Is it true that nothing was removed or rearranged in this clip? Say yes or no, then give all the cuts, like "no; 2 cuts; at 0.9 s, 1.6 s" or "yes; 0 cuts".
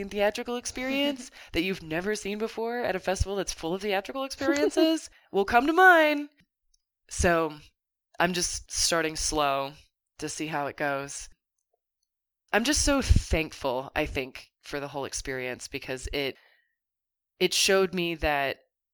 yes; 0 cuts